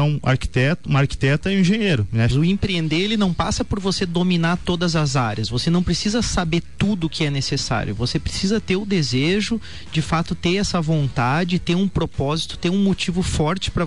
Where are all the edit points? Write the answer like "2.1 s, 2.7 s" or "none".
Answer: 2.3 s